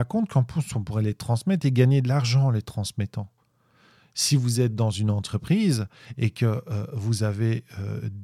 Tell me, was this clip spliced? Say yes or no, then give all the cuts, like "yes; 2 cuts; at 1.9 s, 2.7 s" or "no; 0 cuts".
no; 0 cuts